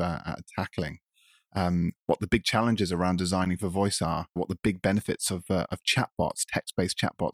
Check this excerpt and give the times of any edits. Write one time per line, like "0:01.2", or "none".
0:04.4